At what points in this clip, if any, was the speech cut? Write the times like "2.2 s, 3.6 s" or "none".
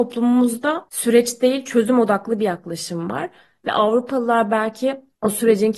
none

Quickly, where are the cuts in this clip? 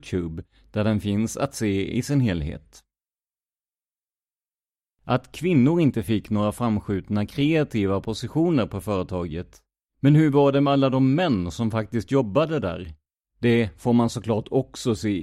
9.9 s, 13.2 s

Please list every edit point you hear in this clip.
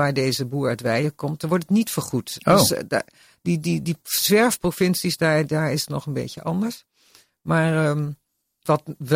none

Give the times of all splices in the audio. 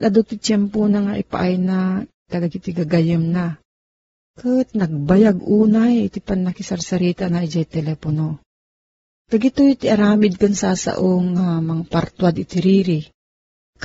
9.2 s

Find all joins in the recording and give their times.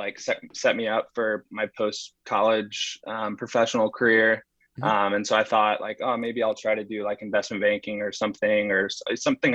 none

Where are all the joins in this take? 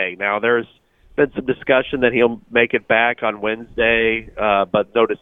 none

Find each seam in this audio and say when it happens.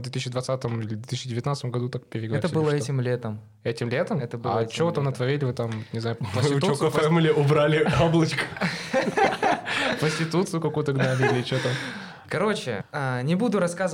12.8 s

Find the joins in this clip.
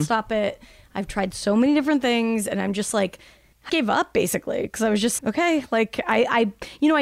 3.7 s, 5.2 s

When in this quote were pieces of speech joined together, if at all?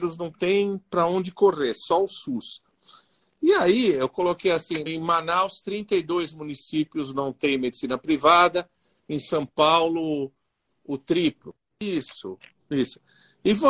4.9 s, 11.7 s

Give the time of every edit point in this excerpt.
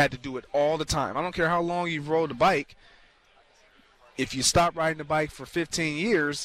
none

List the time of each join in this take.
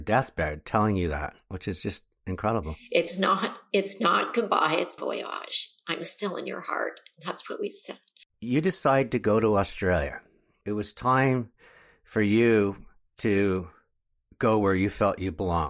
5.0 s

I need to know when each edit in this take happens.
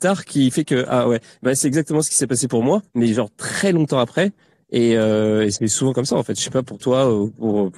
2.9 s

